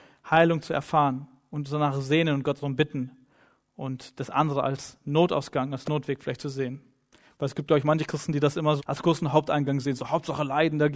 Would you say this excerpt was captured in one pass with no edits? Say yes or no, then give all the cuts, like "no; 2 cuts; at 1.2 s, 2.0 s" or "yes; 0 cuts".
no; 1 cut; at 8.8 s